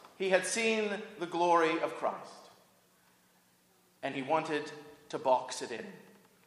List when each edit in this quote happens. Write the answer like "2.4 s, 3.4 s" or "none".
none